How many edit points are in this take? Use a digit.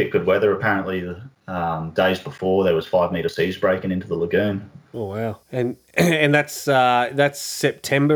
1